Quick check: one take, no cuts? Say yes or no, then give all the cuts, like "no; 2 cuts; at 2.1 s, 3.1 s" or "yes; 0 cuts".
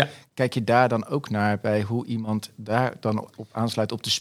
yes; 0 cuts